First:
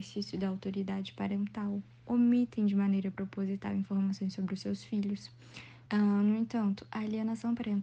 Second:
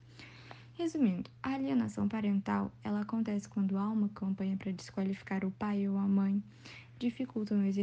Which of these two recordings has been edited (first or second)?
first